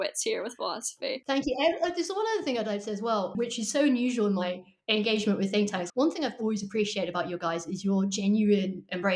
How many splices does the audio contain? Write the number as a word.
two